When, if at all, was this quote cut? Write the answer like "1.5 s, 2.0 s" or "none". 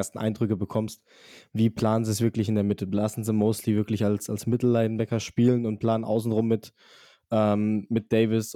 none